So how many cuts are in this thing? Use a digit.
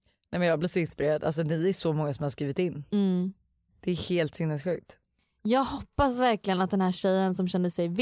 0